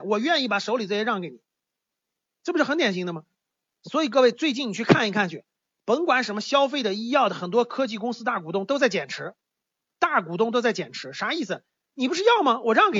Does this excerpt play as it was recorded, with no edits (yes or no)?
yes